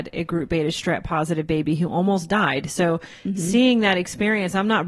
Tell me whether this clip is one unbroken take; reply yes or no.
yes